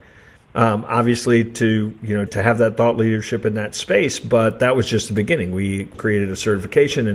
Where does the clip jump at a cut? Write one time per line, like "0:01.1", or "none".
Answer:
0:02.3
0:05.9

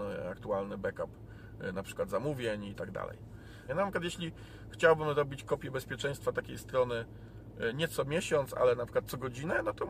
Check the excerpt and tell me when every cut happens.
0:03.7

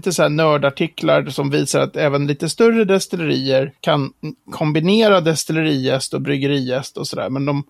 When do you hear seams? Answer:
none

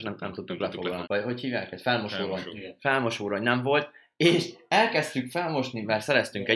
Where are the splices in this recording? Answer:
0:01.0

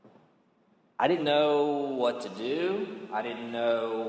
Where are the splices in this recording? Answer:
0:01.2

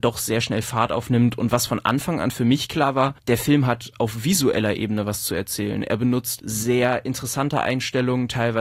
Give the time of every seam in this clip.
none

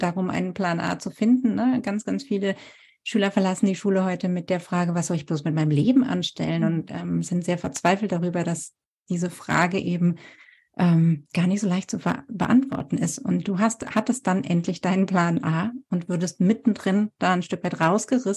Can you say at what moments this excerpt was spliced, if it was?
none

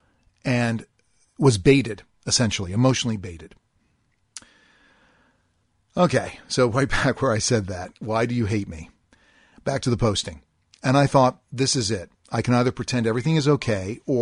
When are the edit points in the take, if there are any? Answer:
none

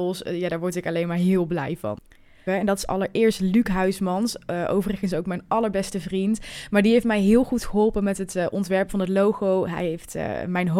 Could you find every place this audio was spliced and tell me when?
0:02.5

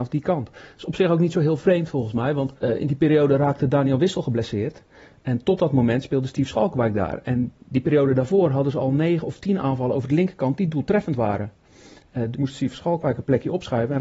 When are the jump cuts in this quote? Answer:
0:02.6
0:12.3

